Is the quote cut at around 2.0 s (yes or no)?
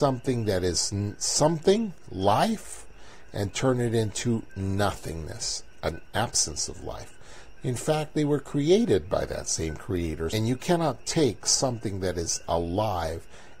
no